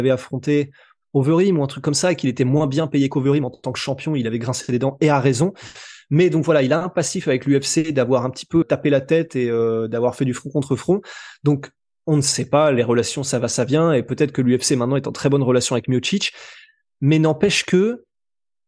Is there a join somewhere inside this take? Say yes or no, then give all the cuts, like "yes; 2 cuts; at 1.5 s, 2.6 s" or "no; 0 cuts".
yes; 1 cut; at 8.6 s